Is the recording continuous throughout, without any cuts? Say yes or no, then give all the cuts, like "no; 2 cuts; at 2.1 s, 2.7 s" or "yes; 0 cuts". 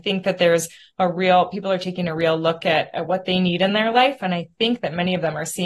yes; 0 cuts